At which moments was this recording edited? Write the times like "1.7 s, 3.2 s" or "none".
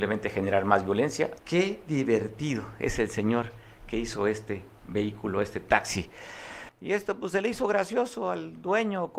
1.4 s, 6.7 s